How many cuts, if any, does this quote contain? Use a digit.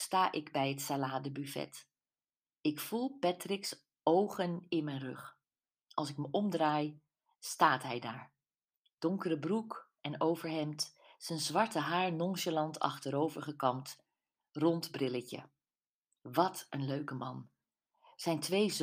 0